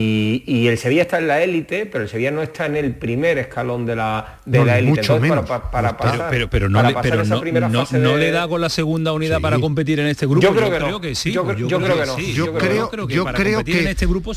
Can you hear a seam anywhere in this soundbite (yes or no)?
no